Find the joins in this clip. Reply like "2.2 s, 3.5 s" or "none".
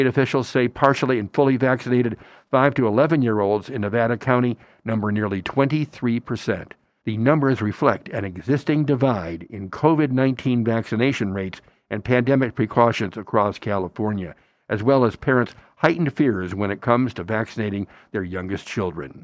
7.0 s